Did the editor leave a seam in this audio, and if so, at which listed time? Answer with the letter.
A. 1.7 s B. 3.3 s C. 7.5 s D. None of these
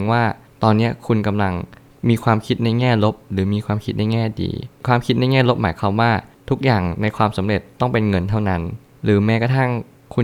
D